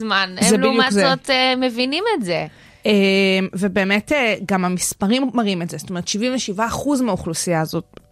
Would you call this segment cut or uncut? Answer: uncut